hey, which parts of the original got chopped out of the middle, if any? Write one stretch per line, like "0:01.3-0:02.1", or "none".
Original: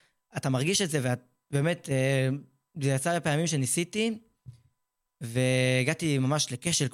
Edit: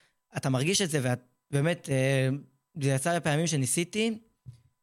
none